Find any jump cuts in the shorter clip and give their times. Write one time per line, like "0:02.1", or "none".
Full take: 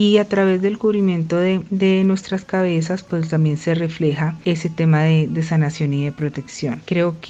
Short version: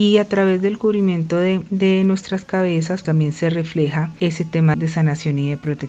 0:03.0
0:04.7